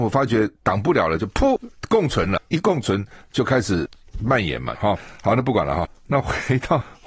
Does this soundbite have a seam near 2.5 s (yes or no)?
yes